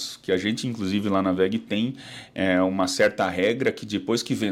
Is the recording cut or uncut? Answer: uncut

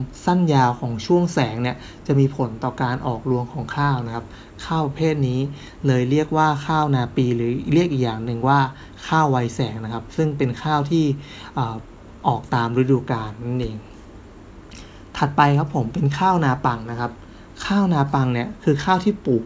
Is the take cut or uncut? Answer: uncut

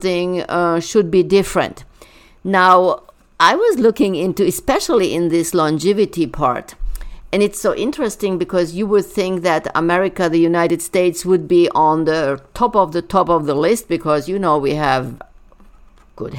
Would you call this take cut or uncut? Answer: uncut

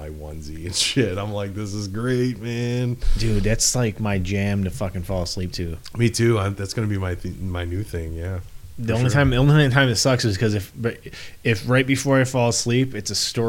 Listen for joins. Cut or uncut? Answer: uncut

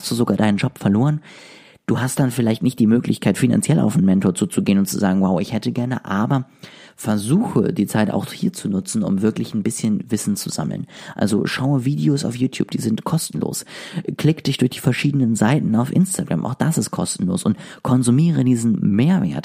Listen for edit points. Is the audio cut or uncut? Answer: uncut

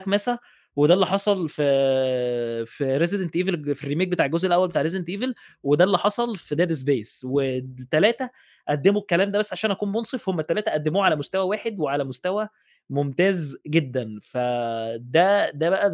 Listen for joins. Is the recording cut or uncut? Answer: uncut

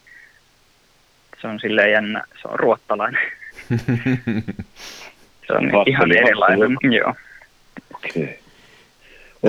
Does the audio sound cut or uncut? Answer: cut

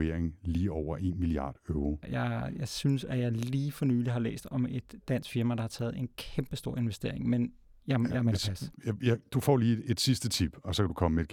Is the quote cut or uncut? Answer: cut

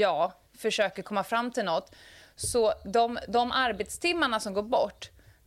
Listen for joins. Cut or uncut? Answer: uncut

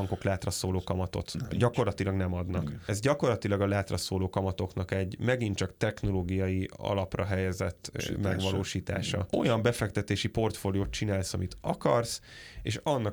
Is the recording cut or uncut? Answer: uncut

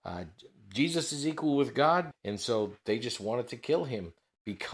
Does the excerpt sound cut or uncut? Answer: cut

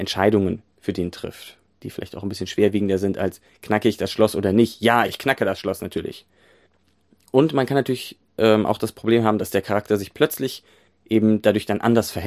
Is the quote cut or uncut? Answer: cut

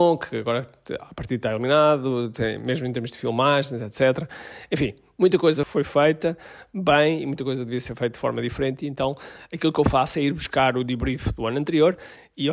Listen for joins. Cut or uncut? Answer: uncut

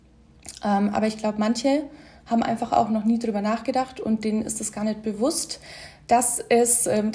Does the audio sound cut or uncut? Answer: uncut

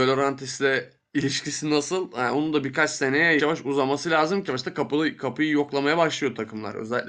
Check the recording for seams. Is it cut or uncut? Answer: cut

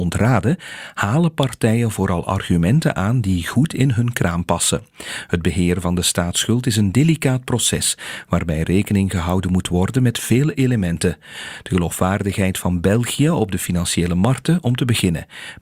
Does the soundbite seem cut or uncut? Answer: uncut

